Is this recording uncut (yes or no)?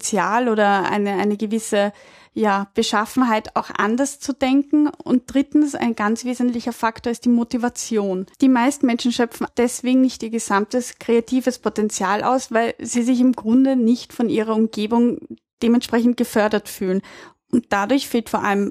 no